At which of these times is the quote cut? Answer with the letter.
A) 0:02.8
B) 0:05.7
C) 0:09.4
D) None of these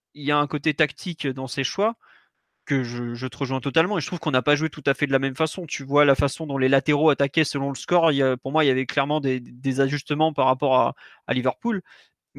D